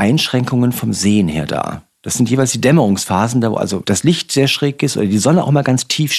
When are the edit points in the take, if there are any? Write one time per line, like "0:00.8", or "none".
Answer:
none